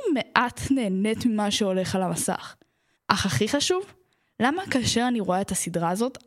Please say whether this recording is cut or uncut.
cut